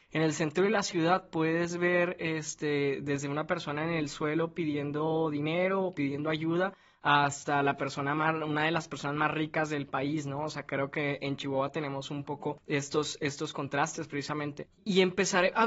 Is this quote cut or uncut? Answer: uncut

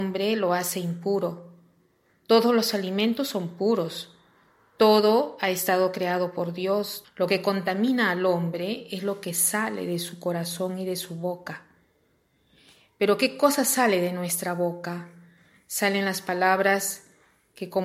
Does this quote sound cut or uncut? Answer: cut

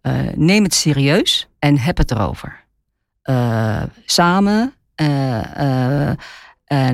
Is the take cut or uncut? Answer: cut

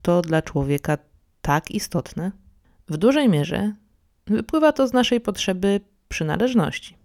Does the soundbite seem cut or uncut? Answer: uncut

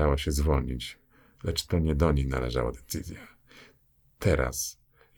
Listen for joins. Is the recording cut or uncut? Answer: uncut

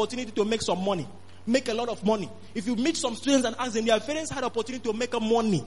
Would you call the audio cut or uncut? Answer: uncut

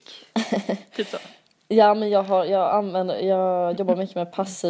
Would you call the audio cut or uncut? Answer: uncut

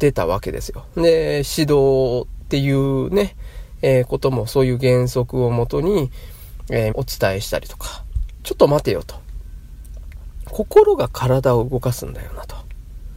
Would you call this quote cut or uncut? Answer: cut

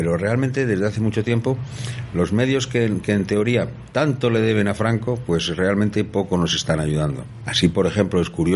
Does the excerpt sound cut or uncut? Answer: cut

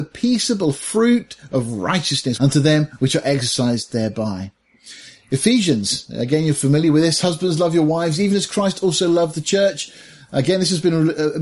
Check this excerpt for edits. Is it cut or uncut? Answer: cut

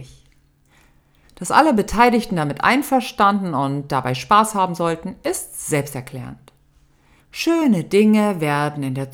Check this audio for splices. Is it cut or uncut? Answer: cut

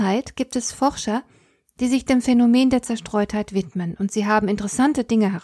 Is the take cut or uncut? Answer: uncut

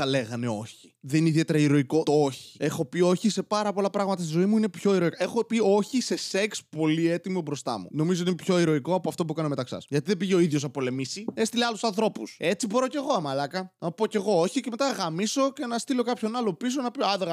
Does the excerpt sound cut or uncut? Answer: uncut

